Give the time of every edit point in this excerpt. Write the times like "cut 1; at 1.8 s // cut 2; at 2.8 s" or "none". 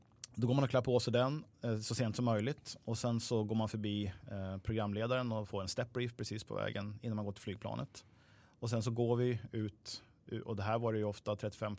none